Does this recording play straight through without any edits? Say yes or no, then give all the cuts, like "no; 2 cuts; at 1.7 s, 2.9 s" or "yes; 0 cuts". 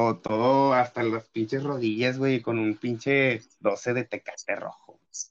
yes; 0 cuts